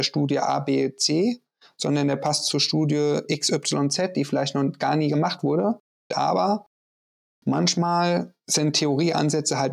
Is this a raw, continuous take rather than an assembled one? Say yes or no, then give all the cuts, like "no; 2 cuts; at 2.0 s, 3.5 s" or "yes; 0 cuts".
no; 2 cuts; at 6.1 s, 8.4 s